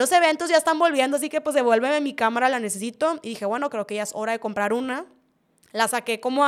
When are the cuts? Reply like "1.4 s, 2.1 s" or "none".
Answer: none